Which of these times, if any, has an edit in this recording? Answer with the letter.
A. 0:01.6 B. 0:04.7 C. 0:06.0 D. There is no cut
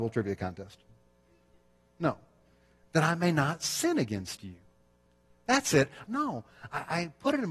C